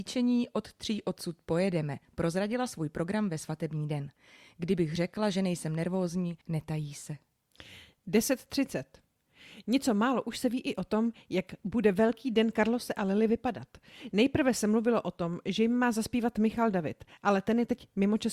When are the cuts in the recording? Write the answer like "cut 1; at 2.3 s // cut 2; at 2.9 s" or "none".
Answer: cut 1; at 6.4 s